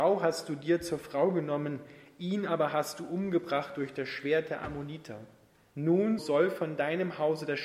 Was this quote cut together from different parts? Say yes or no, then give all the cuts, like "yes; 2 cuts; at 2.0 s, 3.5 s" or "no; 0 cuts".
yes; 1 cut; at 6.2 s